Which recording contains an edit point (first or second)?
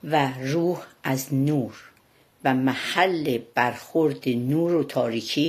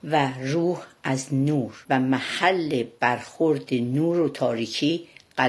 second